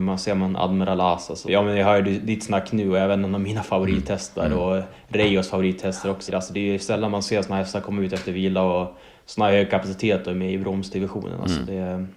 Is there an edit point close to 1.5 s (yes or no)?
yes